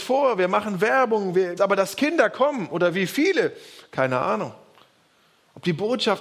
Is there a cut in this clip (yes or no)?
yes